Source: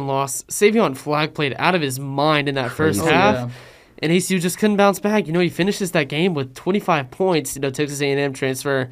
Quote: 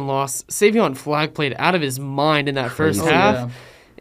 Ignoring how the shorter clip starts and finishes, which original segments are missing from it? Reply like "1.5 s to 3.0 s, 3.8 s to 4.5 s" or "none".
none